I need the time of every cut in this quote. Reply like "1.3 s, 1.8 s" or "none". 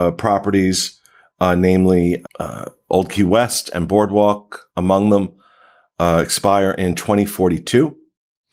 2.2 s